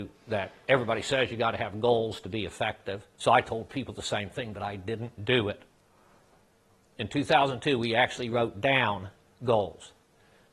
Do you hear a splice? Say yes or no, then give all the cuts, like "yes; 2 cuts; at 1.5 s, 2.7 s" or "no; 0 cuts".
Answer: yes; 1 cut; at 3.1 s